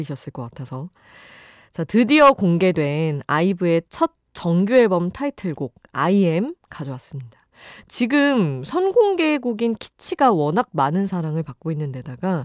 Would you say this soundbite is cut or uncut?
uncut